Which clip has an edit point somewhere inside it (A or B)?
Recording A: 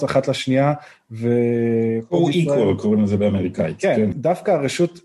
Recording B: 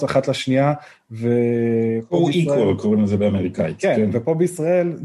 A